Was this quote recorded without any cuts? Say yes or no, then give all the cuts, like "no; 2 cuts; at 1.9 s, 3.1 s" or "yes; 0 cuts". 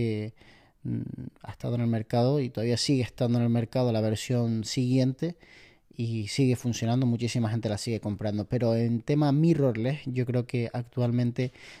yes; 0 cuts